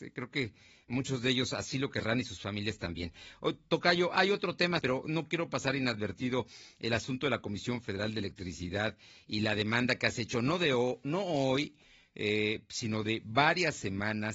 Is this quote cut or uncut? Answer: cut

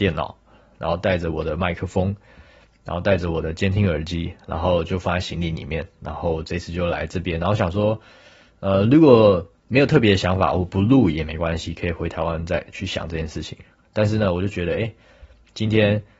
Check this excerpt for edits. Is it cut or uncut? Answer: uncut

